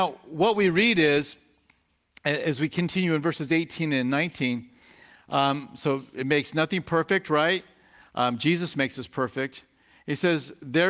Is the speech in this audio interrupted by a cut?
no; 0 cuts

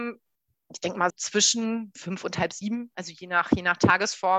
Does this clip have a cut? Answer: yes; 1 cut; at 1.1 s

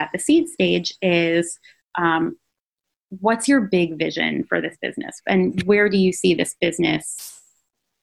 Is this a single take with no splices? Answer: no; 1 cut; at 5.2 s

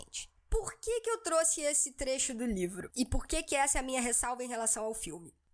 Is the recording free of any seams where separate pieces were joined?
yes; 0 cuts

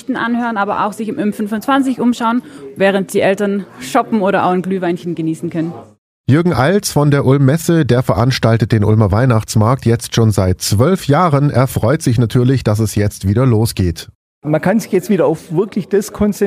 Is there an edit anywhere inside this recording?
no; 0 cuts

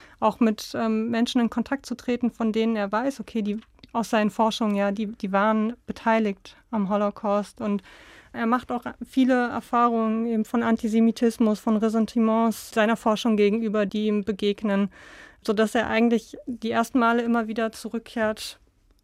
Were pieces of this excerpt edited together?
no; 0 cuts

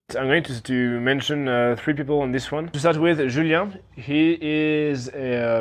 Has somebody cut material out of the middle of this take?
no; 0 cuts

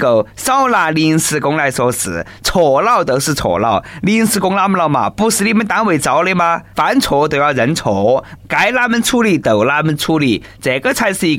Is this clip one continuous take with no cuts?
no; 2 cuts; at 6.7 s, 8.4 s

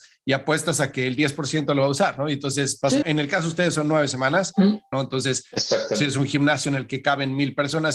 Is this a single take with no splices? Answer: no; 2 cuts; at 3.0 s, 4.9 s

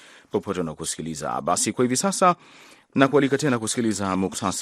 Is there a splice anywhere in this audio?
no; 0 cuts

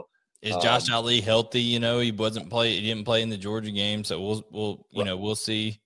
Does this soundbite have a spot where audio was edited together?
no; 0 cuts

